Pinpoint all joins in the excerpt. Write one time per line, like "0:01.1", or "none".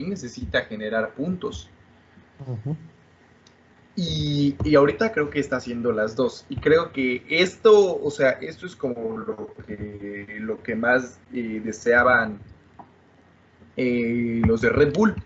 none